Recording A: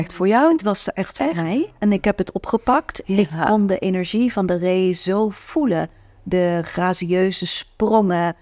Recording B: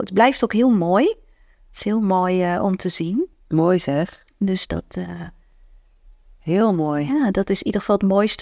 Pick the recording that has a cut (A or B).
A